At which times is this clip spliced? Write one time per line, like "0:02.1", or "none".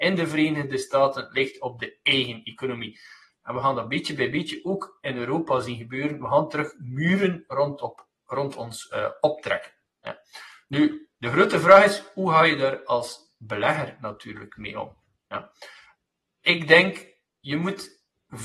none